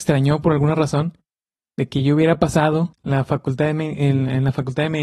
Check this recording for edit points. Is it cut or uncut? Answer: uncut